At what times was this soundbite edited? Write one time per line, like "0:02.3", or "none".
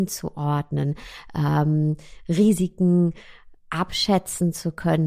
0:03.6

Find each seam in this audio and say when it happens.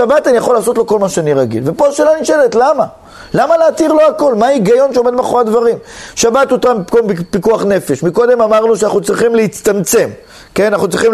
none

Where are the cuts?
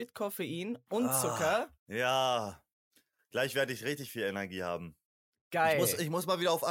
0:01.8

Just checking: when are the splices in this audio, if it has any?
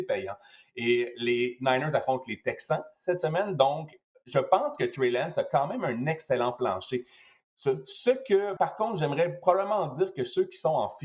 0:08.6

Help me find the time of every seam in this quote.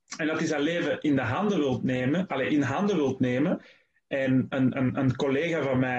0:04.7

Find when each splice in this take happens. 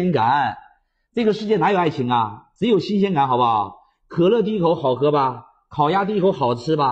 none

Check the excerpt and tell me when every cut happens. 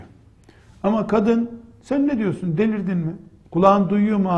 none

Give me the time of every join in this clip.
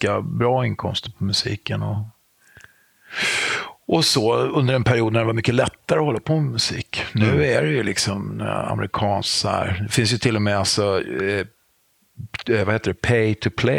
none

